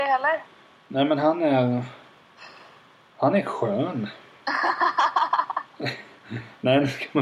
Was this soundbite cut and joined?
no; 0 cuts

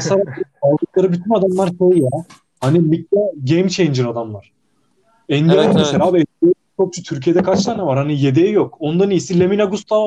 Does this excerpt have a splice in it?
no; 0 cuts

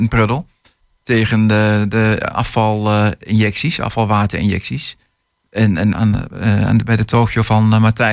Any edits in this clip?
yes; 1 cut; at 5.9 s

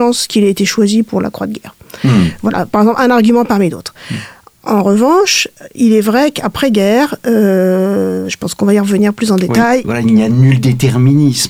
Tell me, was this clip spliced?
yes; 1 cut; at 9.8 s

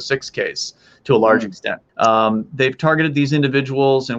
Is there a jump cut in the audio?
yes; 1 cut; at 1.9 s

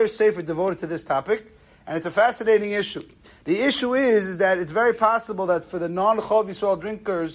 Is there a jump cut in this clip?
no; 0 cuts

